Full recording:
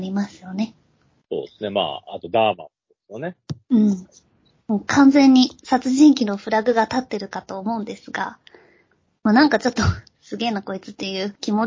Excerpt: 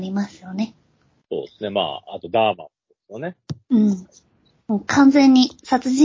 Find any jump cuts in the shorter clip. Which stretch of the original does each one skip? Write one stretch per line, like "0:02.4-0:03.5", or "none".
none